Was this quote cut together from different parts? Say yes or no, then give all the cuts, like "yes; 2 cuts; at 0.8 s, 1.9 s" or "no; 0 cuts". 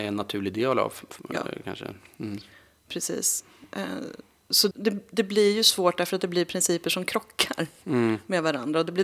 yes; 1 cut; at 4.7 s